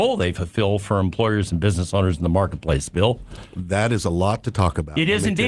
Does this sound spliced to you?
no; 0 cuts

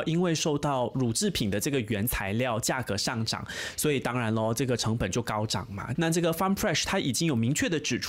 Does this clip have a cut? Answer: yes; 1 cut; at 5.9 s

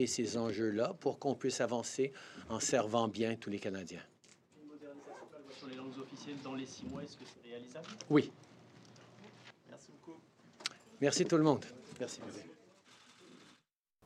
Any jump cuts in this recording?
yes; 1 cut; at 12.0 s

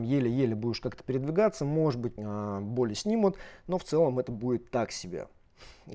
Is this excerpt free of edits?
no; 1 cut; at 2.2 s

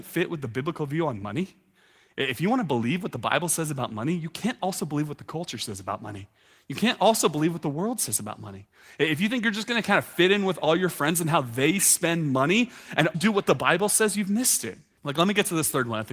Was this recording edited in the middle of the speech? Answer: yes; 2 cuts; at 13.1 s, 15.0 s

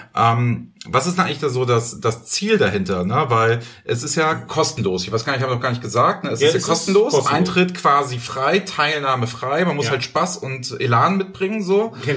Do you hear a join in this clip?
no; 0 cuts

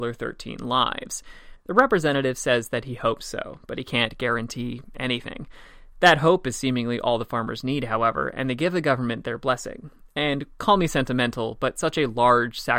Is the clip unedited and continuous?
no; 1 cut; at 1.6 s

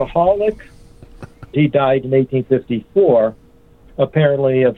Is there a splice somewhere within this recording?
yes; 1 cut; at 1.5 s

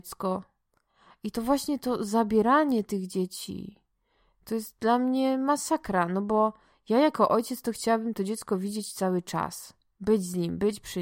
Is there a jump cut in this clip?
no; 0 cuts

